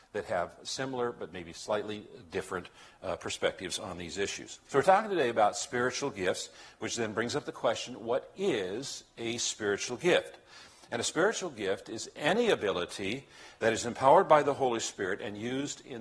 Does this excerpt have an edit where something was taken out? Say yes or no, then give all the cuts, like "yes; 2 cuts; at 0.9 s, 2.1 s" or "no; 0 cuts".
yes; 1 cut; at 4.6 s